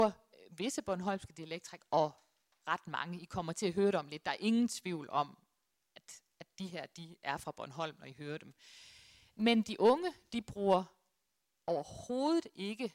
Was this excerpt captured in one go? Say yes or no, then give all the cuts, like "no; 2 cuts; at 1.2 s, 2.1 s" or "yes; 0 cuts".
yes; 0 cuts